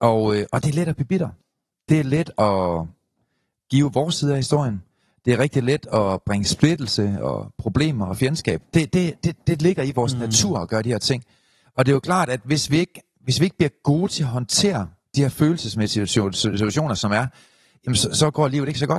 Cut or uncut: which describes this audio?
uncut